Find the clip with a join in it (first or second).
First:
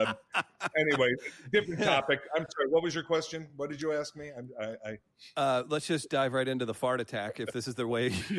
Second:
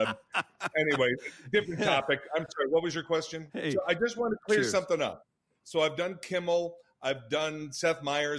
second